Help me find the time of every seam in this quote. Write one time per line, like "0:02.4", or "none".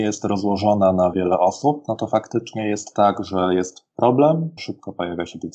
0:01.1
0:04.6